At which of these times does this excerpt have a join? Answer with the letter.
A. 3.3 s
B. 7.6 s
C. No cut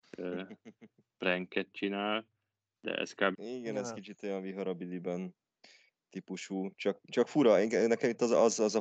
A